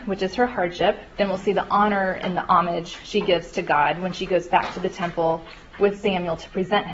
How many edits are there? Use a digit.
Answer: 1